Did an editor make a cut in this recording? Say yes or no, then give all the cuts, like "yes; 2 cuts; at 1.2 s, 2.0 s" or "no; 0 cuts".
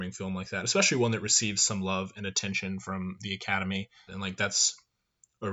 yes; 1 cut; at 4.1 s